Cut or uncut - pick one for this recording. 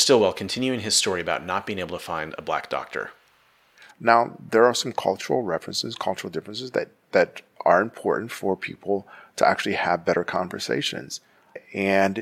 uncut